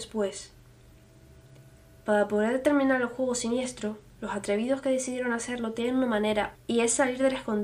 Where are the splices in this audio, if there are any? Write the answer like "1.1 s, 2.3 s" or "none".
6.5 s